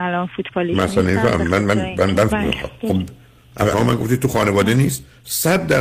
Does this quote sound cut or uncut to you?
cut